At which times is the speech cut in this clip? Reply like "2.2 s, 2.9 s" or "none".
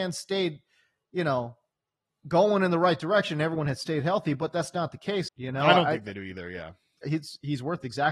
5.3 s, 7.0 s

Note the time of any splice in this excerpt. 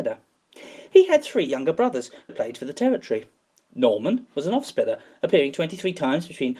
2.3 s

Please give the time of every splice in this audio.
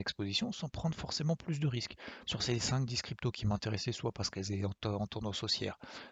2.2 s

